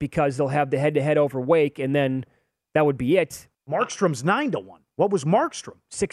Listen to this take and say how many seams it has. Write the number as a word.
one